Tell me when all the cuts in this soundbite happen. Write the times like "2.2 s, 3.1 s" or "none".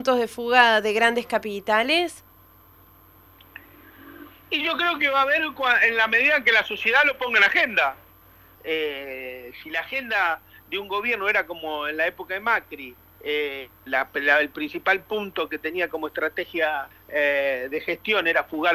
8.6 s, 13.9 s, 17.7 s